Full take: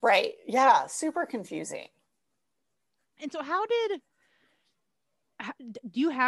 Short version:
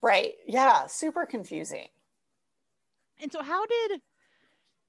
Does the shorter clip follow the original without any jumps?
yes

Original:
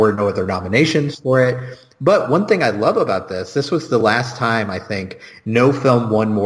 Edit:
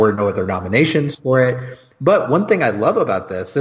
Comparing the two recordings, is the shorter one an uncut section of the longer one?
yes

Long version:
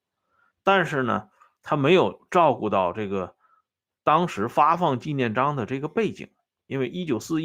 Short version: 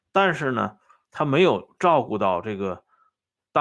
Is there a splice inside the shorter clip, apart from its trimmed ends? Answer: no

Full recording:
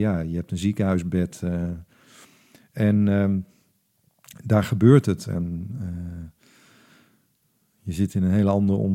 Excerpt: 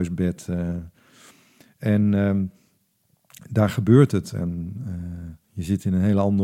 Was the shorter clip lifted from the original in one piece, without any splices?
no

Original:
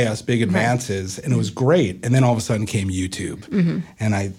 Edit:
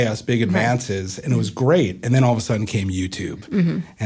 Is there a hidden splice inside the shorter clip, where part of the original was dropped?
no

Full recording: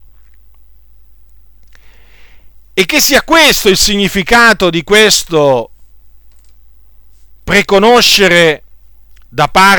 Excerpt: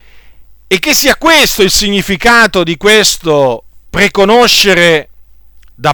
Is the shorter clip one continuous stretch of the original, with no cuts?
no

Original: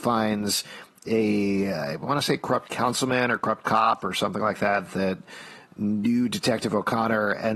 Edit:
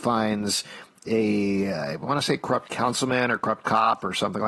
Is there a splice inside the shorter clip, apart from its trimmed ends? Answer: no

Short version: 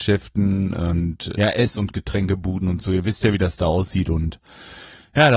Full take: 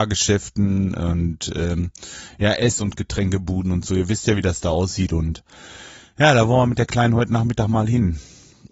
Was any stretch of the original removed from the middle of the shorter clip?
yes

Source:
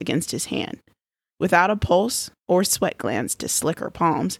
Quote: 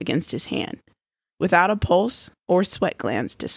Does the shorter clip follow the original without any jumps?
yes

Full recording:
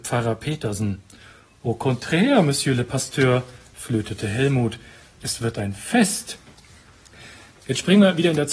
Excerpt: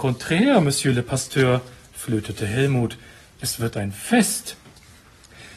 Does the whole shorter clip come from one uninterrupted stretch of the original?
yes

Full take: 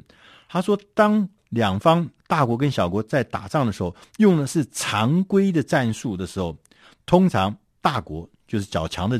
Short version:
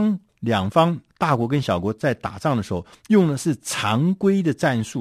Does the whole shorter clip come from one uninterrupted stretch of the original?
yes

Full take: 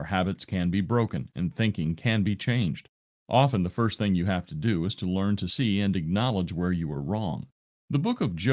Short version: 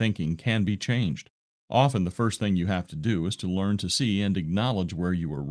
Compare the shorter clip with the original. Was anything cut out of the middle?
no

